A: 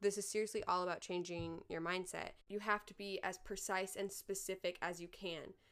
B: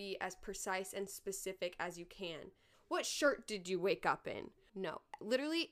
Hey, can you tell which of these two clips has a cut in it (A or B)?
B